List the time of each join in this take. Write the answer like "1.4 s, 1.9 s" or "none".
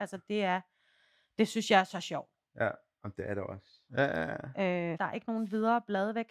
3.9 s, 4.9 s